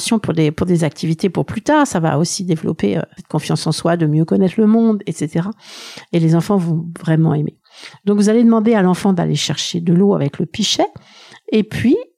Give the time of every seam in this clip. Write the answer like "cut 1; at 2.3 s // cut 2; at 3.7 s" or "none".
cut 1; at 3.2 s